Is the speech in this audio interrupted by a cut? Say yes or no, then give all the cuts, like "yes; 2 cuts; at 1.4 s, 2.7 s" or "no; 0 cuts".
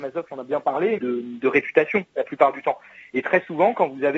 yes; 1 cut; at 1.0 s